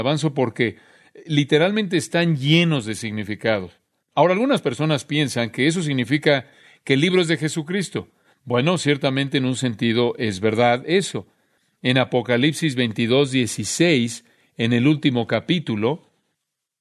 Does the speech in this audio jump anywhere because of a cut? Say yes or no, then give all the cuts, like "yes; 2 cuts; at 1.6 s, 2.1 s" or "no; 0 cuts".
yes; 1 cut; at 4.0 s